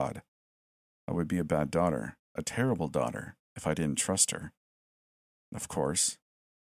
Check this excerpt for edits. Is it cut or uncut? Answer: cut